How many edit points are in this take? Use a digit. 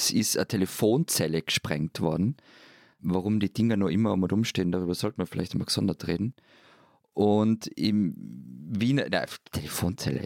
0